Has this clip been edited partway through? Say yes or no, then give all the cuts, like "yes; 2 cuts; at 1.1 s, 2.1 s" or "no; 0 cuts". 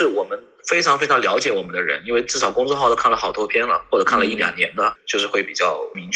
no; 0 cuts